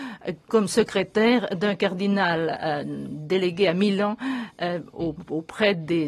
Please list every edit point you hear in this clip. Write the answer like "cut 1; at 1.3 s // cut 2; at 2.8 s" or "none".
none